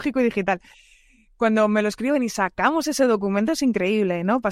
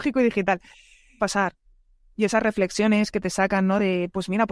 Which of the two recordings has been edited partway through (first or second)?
second